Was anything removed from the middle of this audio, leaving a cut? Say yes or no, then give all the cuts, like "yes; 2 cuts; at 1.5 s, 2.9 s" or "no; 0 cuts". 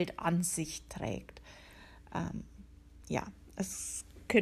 no; 0 cuts